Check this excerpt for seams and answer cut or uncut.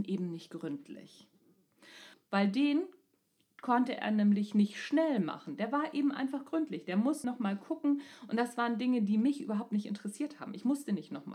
cut